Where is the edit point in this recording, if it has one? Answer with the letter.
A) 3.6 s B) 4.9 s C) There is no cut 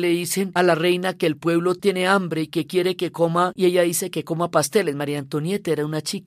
A